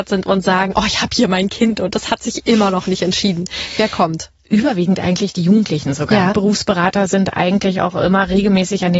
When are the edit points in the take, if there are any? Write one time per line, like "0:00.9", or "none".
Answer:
0:06.3